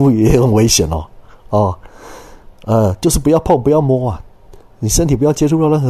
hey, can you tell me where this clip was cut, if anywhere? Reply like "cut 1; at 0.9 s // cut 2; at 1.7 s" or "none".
none

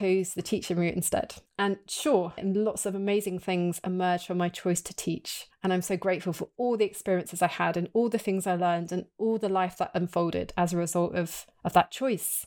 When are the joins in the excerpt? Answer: cut 1; at 2.4 s

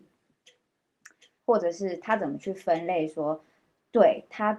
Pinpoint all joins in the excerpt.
cut 1; at 1.4 s

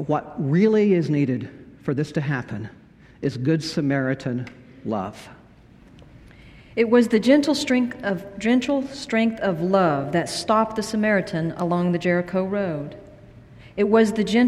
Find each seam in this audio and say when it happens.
none

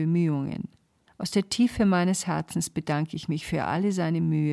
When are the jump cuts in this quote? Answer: cut 1; at 1.1 s

